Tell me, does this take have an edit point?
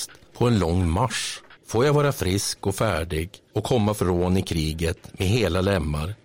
yes; 1 cut; at 1.6 s

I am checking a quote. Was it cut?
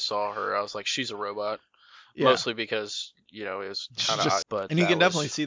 yes; 1 cut; at 4.4 s

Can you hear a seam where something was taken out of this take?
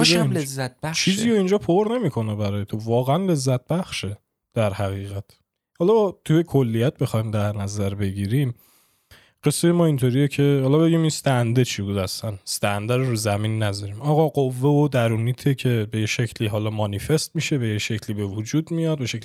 no; 0 cuts

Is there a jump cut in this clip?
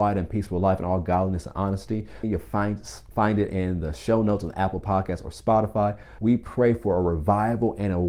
yes; 2 cuts; at 2.2 s, 6.2 s

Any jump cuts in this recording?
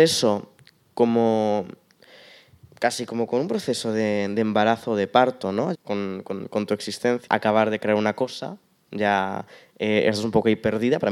yes; 2 cuts; at 5.7 s, 7.3 s

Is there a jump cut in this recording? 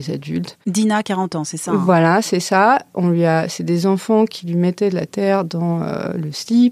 no; 0 cuts

